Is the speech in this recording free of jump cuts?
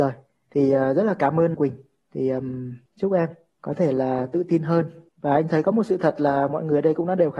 no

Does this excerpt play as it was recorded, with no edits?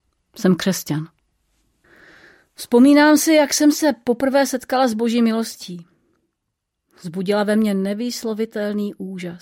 yes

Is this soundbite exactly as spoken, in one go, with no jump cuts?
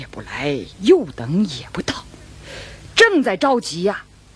yes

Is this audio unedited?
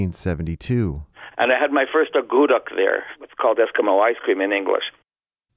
no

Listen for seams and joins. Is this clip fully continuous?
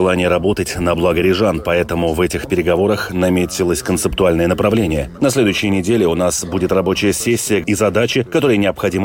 no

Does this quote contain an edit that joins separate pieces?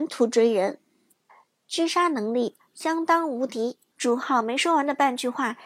yes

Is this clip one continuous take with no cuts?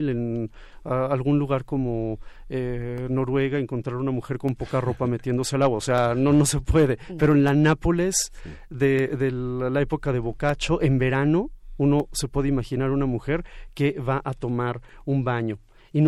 yes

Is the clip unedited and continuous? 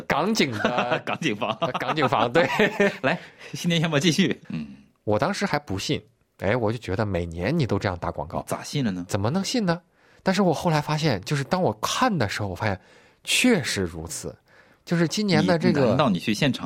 no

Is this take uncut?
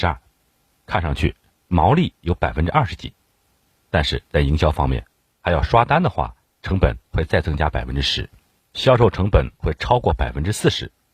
no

